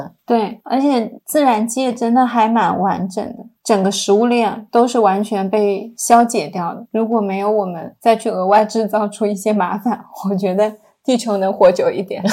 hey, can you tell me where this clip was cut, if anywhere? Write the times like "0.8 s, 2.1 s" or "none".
none